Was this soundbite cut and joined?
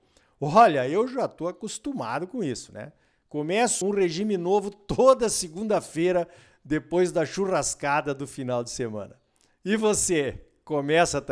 yes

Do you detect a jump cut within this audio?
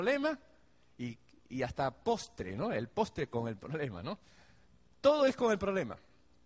no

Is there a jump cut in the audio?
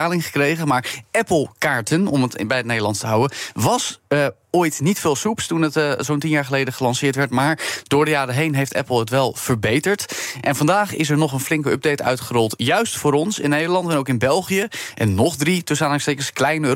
no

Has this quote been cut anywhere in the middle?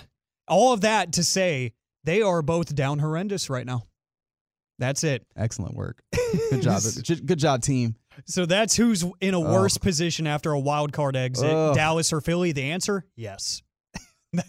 no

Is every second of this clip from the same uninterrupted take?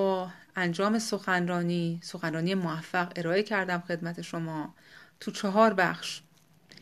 yes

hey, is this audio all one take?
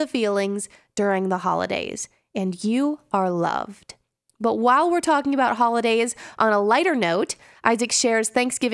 yes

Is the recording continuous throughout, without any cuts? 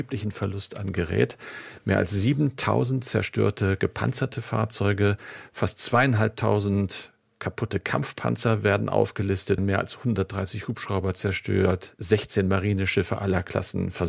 no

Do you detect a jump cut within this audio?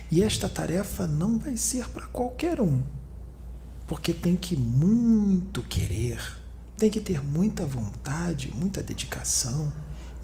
no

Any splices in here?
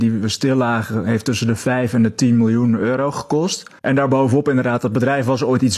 yes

